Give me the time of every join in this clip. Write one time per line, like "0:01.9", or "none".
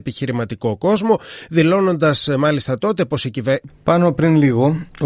0:03.7